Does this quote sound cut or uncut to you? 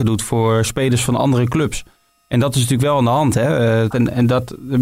cut